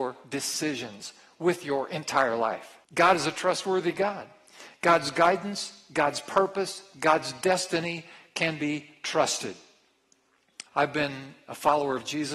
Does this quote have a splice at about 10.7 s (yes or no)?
yes